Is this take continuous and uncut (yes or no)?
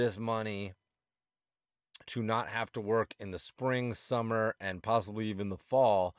no